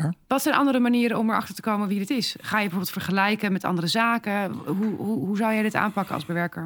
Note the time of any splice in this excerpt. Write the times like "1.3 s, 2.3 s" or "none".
none

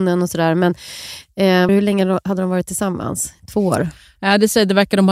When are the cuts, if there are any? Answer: 1.7 s

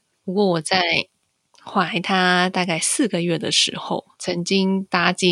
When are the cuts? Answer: 4.1 s

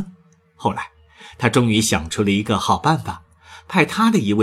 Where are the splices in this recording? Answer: none

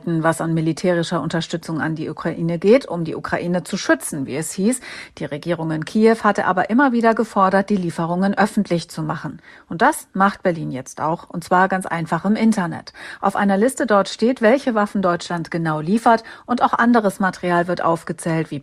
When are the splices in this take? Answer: none

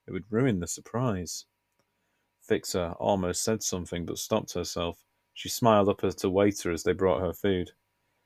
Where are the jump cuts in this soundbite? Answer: none

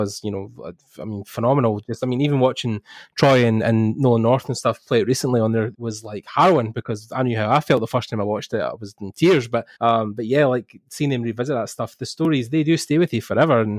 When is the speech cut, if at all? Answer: 5.7 s, 9.7 s

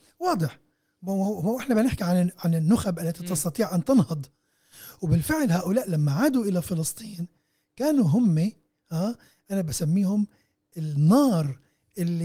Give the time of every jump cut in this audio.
none

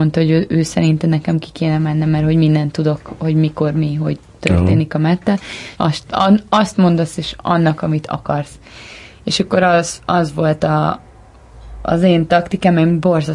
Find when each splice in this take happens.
5.7 s

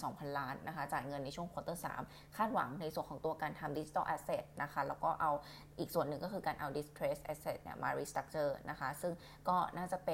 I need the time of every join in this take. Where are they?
none

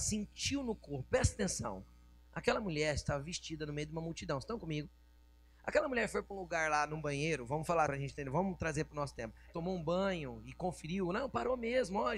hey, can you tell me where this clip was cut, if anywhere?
7.9 s, 9.5 s

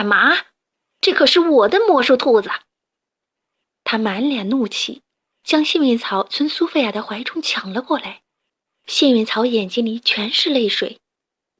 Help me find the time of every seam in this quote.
8.7 s

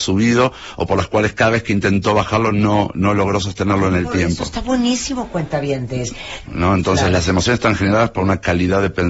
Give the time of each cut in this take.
6.4 s

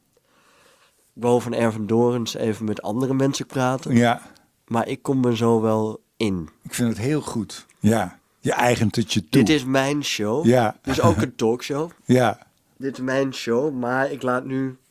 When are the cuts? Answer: 7.7 s

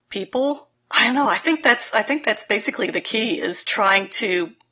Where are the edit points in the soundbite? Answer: none

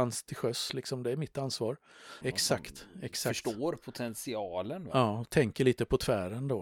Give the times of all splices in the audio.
2.2 s

